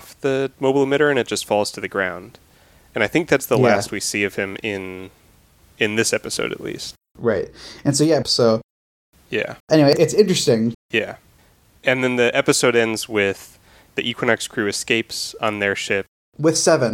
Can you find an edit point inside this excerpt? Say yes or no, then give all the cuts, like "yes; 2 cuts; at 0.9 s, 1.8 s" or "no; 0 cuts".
yes; 3 cuts; at 8.2 s, 9.6 s, 10.7 s